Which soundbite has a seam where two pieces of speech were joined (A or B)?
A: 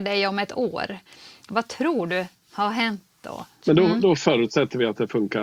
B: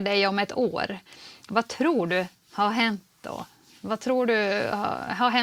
A